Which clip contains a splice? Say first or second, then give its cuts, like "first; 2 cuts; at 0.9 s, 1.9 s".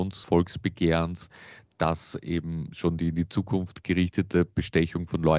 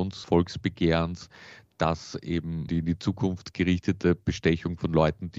second; 1 cut; at 2.7 s